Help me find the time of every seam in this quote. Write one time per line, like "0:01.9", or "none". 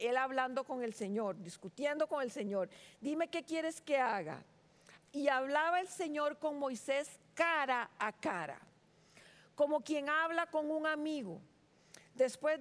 0:05.0